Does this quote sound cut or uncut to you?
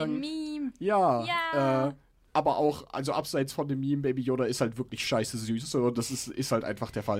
uncut